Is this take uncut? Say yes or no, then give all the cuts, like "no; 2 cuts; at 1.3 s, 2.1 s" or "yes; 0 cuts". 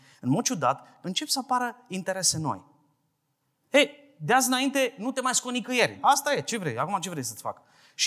no; 3 cuts; at 1.0 s, 3.6 s, 6.0 s